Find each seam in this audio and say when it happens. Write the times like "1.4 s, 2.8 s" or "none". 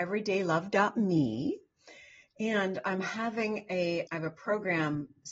4.1 s